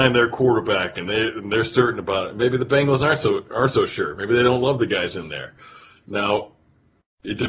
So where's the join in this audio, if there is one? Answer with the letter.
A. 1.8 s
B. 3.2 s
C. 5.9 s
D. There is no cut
D